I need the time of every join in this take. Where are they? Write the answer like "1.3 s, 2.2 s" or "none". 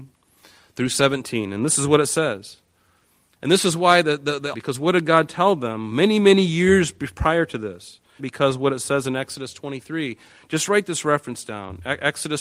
4.5 s, 8.2 s